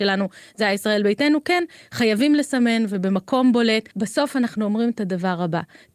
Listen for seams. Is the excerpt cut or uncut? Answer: cut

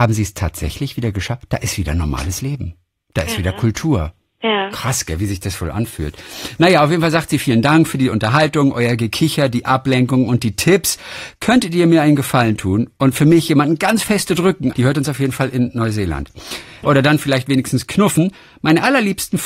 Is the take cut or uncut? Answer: cut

